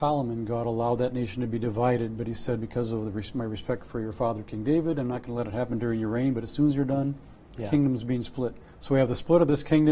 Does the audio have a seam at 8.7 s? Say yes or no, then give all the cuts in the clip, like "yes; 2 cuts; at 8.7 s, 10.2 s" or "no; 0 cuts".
yes; 1 cut; at 8.7 s